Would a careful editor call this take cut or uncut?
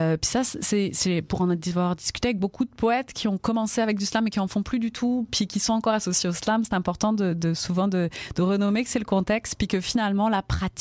uncut